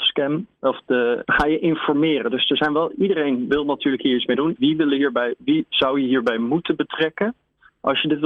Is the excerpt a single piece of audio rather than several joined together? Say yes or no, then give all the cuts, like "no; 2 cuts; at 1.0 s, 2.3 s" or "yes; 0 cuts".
no; 2 cuts; at 1.2 s, 4.6 s